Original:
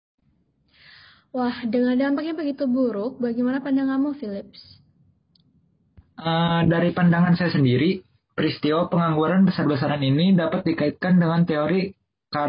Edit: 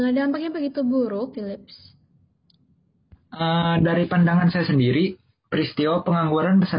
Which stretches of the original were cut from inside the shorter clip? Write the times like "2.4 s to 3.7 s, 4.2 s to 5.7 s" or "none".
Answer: 3.2 s to 4.2 s